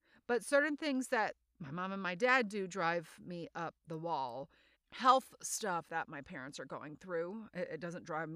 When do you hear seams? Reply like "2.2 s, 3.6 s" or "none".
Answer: 4.7 s